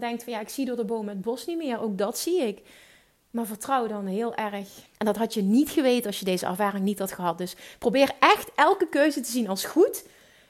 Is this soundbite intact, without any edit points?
no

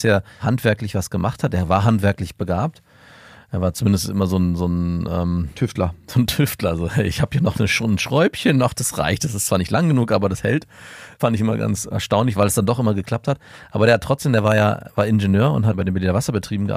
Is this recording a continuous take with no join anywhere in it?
yes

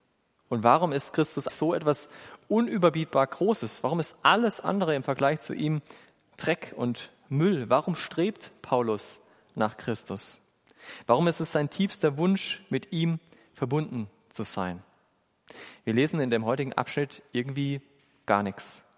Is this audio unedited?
no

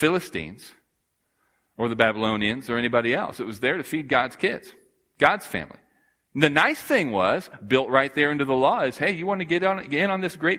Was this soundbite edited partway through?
no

